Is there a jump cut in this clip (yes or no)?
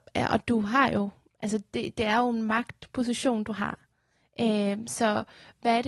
no